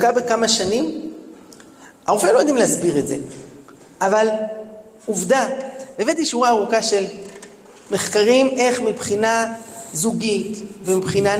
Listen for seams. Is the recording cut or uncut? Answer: uncut